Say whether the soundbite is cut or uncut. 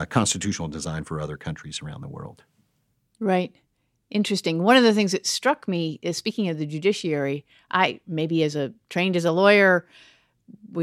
uncut